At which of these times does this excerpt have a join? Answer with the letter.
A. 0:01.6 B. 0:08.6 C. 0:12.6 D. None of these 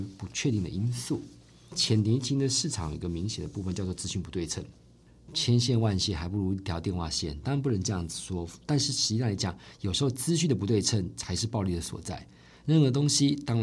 D